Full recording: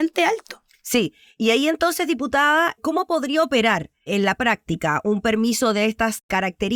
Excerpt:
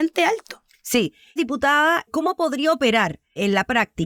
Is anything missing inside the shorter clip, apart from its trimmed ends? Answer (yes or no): yes